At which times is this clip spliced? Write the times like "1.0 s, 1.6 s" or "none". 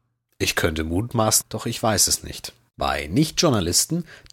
1.4 s, 2.7 s